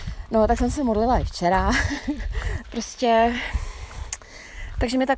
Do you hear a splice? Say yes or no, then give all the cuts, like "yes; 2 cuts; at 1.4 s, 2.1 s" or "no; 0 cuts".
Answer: yes; 1 cut; at 2.6 s